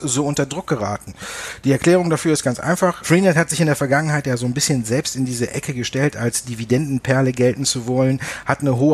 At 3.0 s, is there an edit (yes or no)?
yes